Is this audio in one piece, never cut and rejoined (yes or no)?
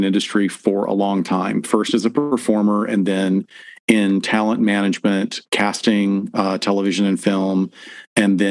yes